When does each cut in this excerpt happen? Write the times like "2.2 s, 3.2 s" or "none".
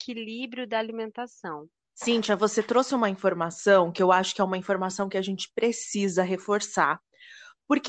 1.9 s